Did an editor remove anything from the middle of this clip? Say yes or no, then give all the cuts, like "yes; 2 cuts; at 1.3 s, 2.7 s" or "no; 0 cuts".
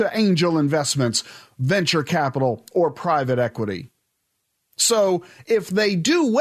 no; 0 cuts